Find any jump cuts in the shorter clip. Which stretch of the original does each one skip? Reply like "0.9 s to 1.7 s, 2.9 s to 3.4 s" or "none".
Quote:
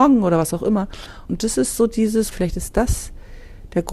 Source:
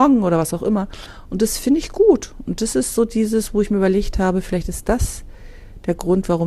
1.3 s to 2.4 s, 3.5 s to 4.4 s